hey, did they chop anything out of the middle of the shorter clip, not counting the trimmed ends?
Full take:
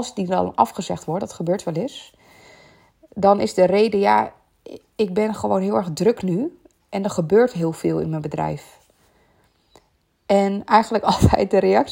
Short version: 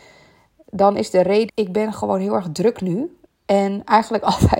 yes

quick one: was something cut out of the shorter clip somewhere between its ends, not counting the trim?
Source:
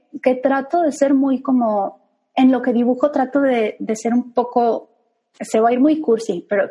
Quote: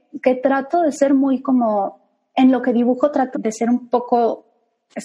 yes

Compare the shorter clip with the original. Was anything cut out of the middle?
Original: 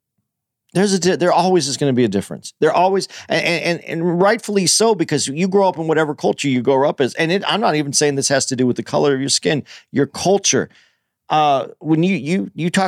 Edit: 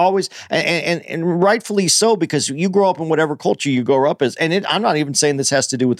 no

